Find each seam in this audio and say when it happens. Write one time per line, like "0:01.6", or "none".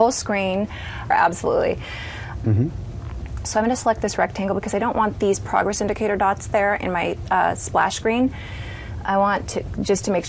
0:01.1
0:02.4